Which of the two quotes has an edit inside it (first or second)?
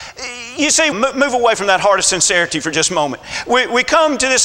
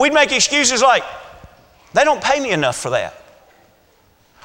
first